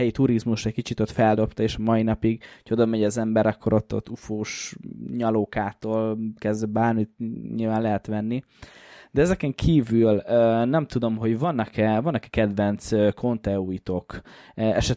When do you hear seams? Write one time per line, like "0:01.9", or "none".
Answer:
none